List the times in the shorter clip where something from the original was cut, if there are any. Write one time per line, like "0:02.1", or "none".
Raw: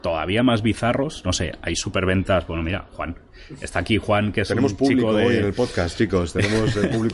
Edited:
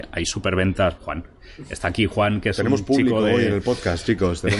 0:01.0